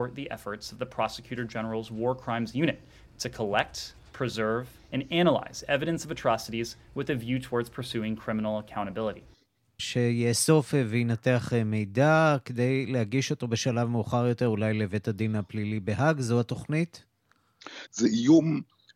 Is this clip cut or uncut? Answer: cut